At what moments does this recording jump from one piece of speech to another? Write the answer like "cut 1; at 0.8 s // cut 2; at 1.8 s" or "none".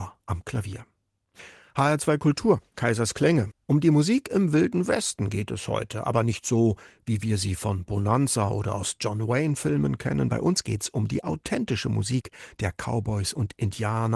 none